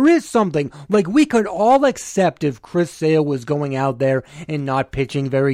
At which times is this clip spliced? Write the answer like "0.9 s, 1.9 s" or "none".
none